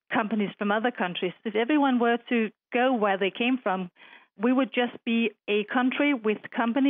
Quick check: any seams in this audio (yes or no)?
yes